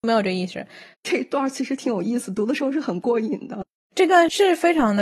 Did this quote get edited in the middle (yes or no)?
yes